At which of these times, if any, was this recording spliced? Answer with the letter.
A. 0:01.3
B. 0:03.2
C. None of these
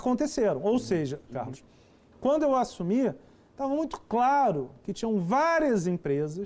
A